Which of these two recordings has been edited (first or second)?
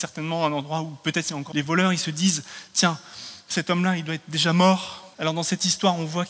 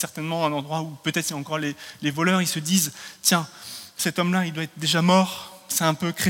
first